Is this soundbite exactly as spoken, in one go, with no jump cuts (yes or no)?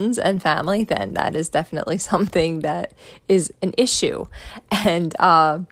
yes